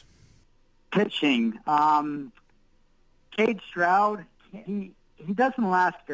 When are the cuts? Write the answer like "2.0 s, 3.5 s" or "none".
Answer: 1.6 s, 4.6 s